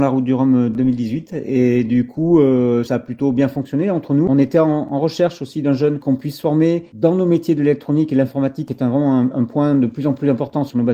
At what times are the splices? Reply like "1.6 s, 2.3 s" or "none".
none